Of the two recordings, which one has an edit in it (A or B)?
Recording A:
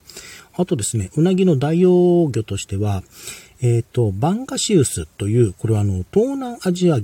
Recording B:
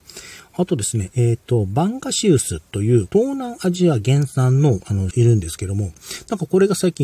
B